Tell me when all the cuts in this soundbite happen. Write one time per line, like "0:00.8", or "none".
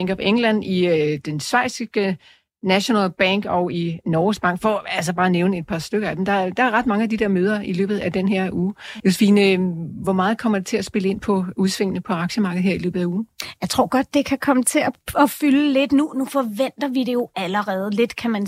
0:09.0